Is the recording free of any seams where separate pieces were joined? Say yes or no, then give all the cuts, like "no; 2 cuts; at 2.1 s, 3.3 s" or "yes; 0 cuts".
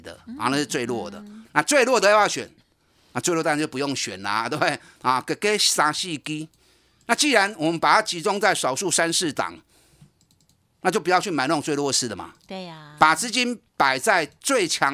no; 1 cut; at 4.9 s